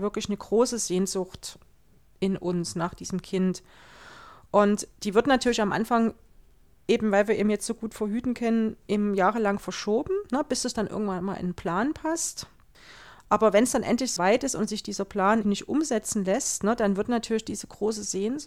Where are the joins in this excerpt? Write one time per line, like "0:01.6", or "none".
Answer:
0:14.2
0:15.4